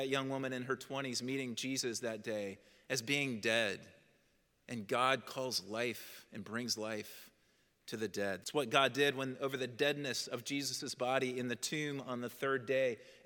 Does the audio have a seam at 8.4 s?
yes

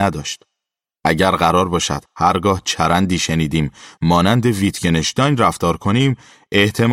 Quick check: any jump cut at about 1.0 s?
yes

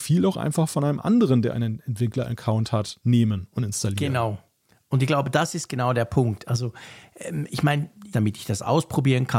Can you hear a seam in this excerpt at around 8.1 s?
yes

